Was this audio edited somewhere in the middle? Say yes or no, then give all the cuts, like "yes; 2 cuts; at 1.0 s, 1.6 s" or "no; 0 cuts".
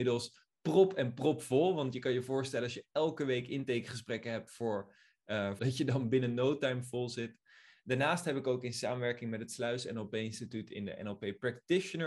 yes; 1 cut; at 5.6 s